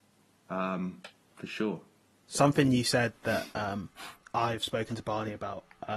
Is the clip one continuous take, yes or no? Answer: yes